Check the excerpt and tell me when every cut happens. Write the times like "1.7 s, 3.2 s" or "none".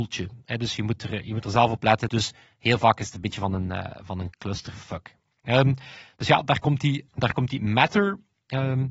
2.1 s, 7.1 s